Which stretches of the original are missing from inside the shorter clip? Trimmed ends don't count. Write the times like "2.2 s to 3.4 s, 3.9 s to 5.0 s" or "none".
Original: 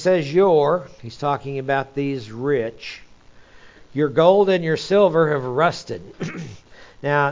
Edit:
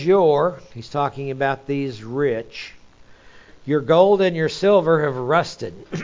none